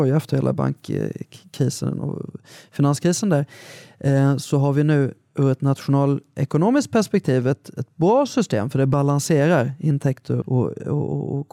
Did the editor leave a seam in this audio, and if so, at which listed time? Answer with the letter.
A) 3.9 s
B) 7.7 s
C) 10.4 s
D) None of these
C